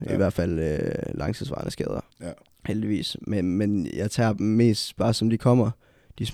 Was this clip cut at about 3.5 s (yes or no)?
no